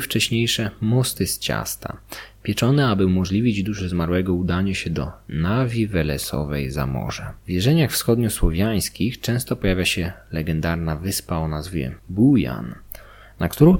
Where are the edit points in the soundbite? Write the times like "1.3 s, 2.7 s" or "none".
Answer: 7.4 s, 12.0 s